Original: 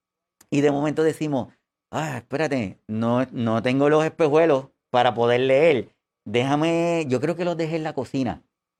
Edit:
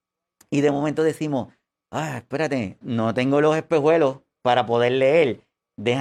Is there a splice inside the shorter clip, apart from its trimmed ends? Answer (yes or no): yes